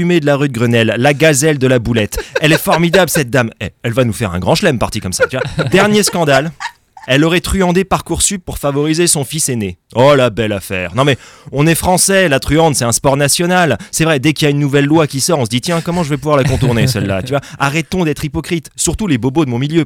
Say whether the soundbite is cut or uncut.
uncut